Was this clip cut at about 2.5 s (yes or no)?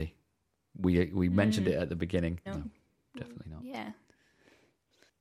yes